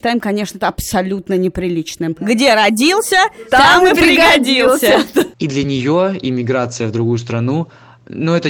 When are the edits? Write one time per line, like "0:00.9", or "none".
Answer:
0:05.3